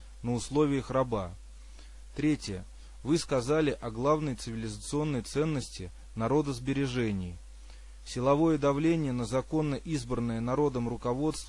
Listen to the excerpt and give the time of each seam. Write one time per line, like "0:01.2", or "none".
none